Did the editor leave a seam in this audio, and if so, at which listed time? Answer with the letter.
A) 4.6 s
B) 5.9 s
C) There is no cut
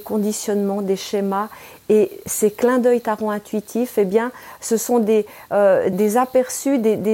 B